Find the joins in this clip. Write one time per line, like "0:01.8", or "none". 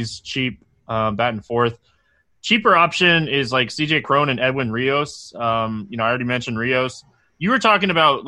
none